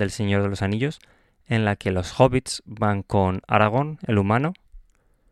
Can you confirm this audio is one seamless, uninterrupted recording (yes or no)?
yes